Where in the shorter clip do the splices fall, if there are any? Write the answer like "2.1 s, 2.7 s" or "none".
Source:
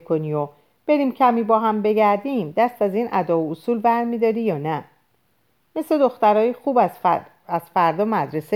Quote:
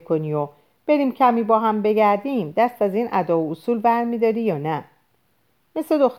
none